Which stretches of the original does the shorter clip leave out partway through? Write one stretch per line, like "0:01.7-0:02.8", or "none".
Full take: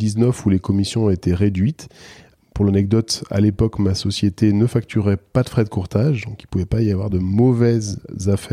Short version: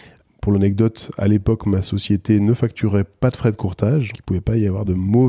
0:06.3-0:06.4